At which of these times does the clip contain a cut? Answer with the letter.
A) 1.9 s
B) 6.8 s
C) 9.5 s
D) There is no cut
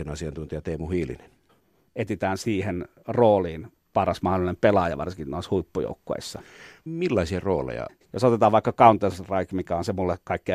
A